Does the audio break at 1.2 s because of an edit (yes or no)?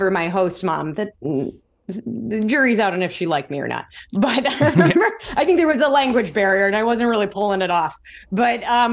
yes